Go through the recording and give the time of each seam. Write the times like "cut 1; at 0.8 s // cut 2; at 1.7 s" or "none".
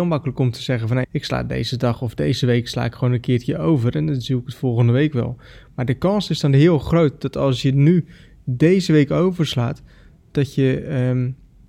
cut 1; at 1.0 s